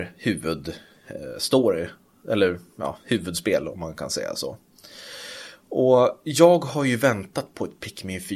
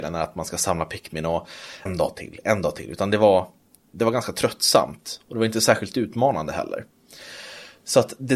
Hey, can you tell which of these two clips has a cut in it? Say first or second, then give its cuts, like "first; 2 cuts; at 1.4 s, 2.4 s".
second; 1 cut; at 1.9 s